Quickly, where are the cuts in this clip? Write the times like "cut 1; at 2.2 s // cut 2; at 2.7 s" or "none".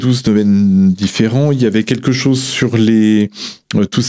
none